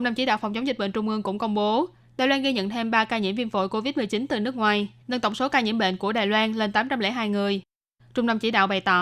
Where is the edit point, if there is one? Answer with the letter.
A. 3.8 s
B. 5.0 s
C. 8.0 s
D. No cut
B